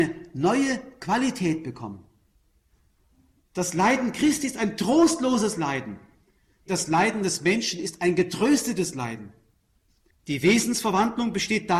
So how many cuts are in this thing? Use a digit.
1